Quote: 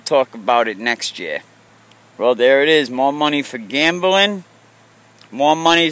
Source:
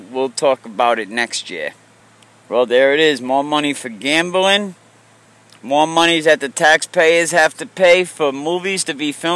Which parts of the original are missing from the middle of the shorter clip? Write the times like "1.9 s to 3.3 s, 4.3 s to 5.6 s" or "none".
none